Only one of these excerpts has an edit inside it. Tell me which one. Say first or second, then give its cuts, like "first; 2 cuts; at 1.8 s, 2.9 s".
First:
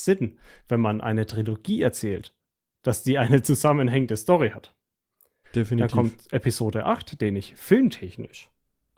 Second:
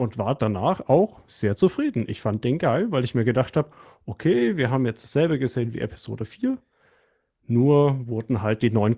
first; 1 cut; at 5.4 s